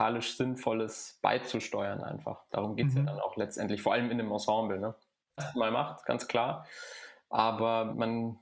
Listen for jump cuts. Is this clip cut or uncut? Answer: cut